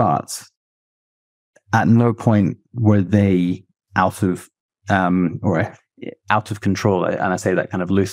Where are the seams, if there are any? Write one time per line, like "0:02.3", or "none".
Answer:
none